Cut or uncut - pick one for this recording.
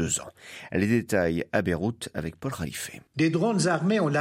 cut